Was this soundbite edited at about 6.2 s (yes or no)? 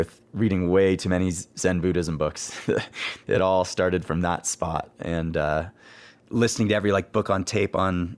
yes